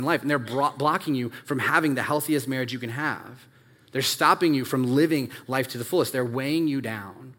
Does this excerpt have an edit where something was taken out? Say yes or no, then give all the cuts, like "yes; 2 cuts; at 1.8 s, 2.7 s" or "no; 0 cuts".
no; 0 cuts